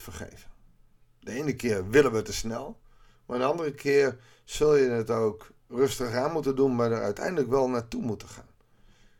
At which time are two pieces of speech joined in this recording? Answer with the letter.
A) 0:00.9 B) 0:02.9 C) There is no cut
C